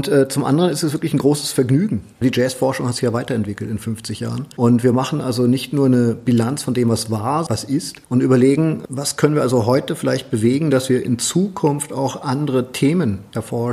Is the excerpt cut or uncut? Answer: cut